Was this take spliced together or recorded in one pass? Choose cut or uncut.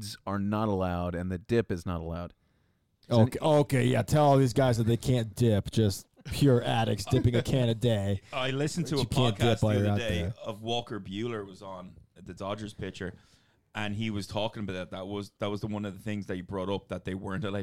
uncut